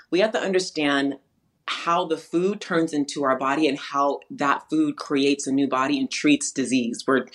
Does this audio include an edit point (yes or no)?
no